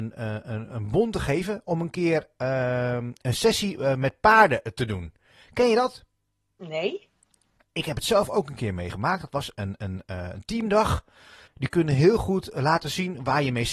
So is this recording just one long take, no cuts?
no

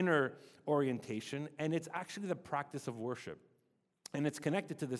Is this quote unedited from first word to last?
yes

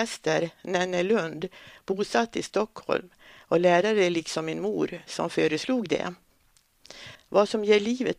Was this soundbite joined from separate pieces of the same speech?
yes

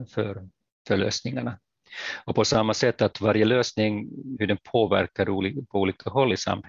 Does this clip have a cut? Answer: yes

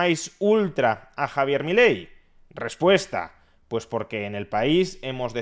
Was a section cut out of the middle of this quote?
no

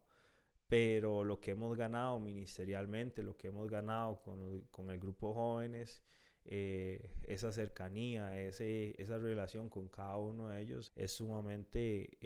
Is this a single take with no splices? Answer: no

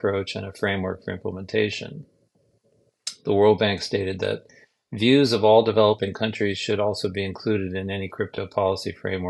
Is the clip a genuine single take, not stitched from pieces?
yes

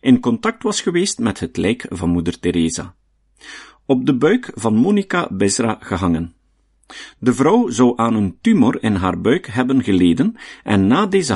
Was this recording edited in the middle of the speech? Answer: no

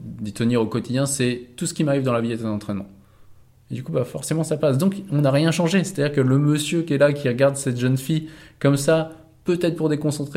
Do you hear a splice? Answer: yes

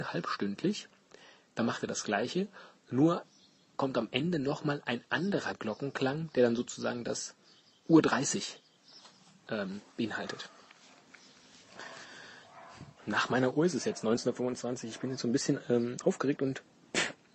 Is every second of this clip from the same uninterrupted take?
yes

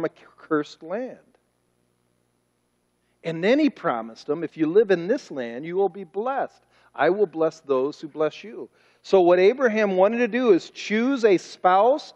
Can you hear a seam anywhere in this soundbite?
no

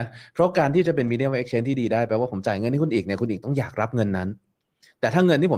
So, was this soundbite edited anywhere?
no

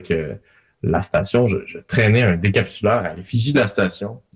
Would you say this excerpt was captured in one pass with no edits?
yes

